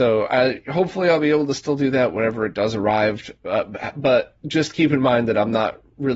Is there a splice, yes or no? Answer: no